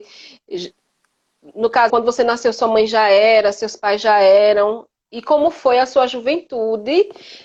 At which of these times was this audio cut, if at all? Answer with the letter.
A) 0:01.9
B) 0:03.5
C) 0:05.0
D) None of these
A